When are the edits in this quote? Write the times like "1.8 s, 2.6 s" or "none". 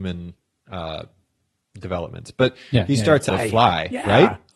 3.3 s

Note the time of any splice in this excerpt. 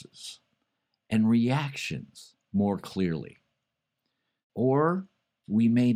4.5 s

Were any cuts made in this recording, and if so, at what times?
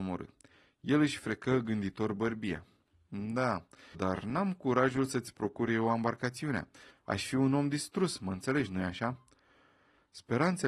3.9 s, 6.9 s

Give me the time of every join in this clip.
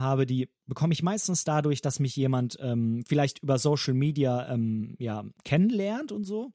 none

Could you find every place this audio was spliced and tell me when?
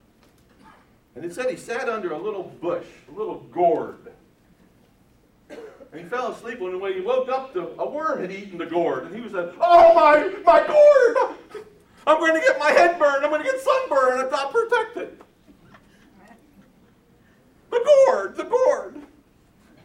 none

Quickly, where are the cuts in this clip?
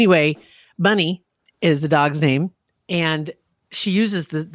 none

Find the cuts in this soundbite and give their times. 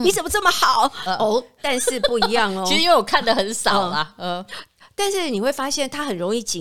1.1 s

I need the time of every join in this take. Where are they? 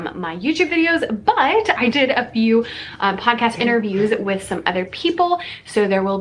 1.9 s

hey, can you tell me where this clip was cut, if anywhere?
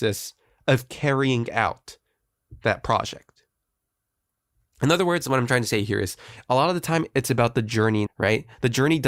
8.1 s

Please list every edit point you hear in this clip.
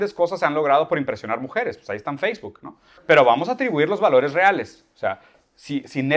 3.0 s

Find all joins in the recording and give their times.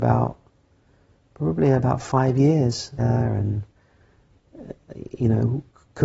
3.0 s

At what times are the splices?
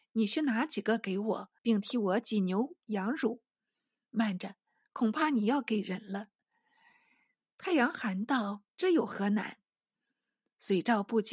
1.6 s

